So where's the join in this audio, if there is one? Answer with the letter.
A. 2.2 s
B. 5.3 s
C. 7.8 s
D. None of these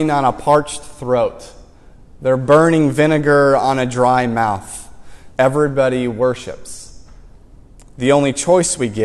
B